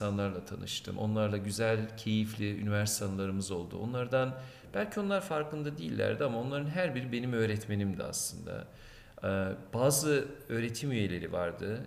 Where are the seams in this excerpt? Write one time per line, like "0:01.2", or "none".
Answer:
none